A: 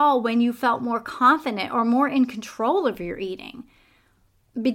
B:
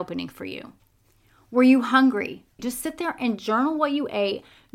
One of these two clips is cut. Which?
B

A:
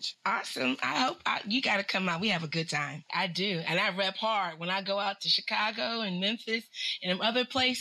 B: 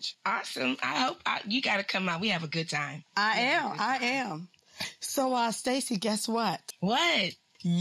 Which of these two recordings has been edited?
A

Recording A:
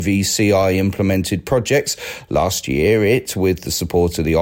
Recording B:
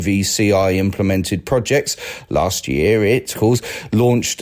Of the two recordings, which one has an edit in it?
B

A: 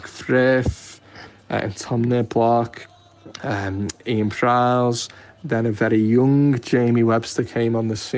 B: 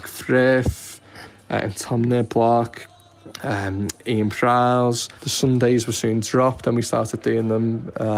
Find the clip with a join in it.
B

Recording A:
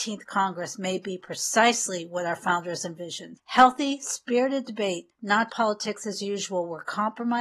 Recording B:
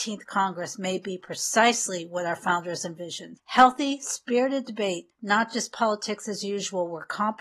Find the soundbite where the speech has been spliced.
A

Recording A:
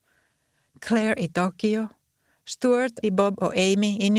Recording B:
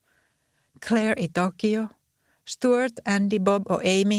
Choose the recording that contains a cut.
A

